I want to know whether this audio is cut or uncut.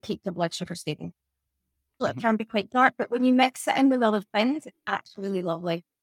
cut